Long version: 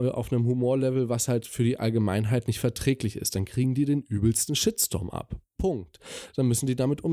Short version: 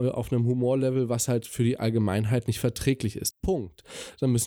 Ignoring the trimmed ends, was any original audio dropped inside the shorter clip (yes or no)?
yes